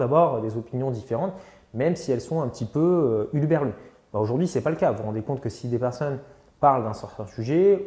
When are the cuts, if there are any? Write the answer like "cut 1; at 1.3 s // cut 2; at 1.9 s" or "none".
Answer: none